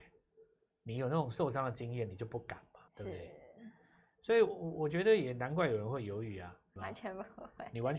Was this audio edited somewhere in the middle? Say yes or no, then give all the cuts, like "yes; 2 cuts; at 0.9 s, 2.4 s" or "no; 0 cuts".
yes; 2 cuts; at 2.9 s, 6.8 s